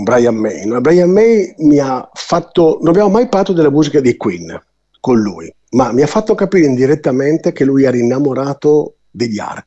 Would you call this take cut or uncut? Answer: uncut